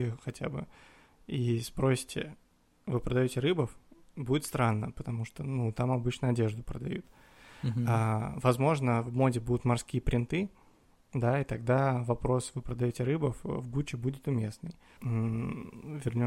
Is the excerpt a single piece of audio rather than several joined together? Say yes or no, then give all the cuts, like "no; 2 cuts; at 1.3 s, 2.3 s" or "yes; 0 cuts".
no; 1 cut; at 15.0 s